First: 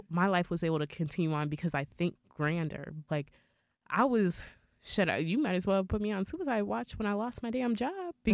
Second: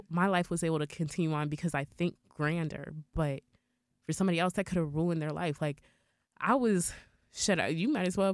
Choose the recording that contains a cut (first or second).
first